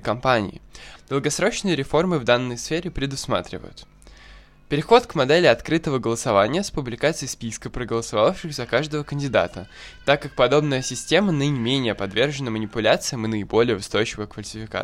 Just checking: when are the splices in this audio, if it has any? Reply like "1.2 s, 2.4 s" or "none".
1.0 s